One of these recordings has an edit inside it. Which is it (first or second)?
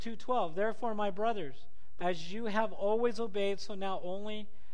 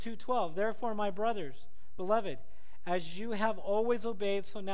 first